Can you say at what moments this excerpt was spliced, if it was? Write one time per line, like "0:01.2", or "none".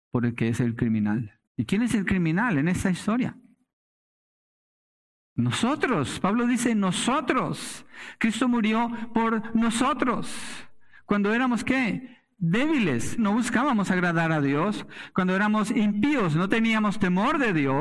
0:01.5
0:13.2